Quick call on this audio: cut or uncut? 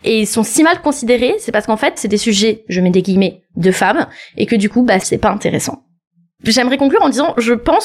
cut